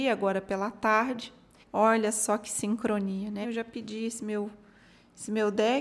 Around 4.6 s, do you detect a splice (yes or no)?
no